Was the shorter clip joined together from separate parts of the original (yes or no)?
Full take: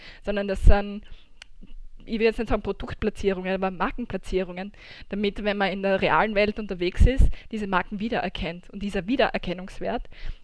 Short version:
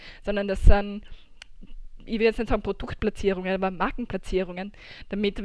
no